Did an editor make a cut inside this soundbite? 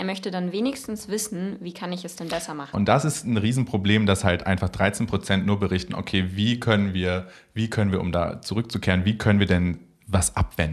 yes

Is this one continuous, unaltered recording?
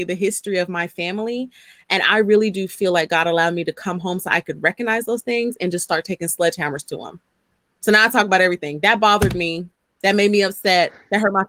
yes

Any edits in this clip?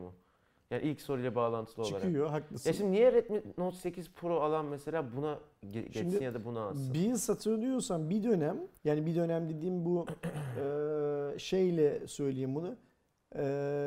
yes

